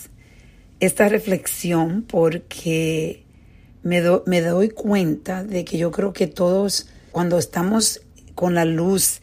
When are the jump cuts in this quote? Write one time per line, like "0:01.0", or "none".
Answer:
0:07.1